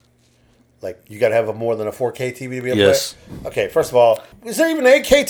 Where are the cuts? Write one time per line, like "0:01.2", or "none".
0:04.3